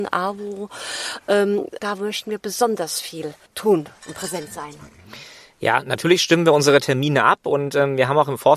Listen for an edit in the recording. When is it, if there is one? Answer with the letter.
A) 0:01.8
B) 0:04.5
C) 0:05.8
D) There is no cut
A